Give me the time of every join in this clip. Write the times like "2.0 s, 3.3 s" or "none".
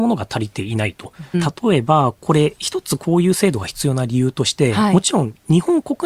1.3 s